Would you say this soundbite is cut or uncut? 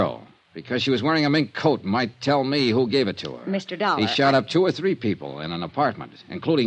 uncut